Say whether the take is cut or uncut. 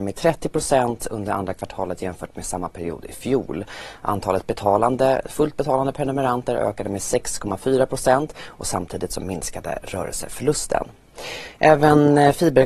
uncut